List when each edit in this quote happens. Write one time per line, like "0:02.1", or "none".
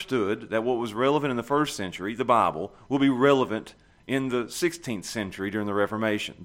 none